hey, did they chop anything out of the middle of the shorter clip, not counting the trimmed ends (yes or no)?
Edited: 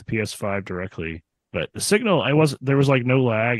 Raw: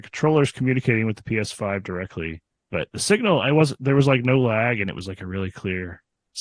no